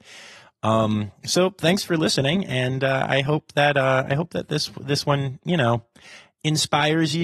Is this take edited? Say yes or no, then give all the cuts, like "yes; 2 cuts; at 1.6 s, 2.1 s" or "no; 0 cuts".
no; 0 cuts